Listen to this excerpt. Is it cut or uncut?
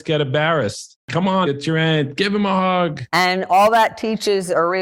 cut